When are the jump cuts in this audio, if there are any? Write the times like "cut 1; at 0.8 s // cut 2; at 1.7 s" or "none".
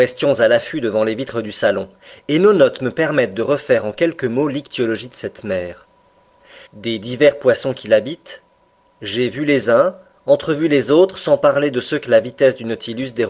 cut 1; at 6.7 s